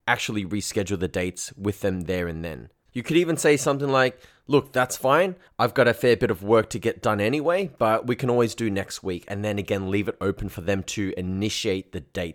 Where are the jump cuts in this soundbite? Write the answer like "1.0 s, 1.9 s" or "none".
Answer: 2.9 s